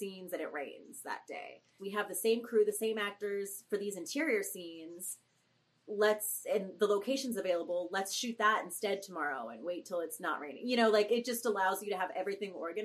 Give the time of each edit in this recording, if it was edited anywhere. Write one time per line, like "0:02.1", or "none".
0:01.8
0:11.1